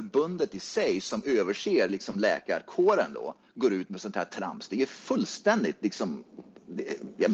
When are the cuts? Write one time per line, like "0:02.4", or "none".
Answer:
none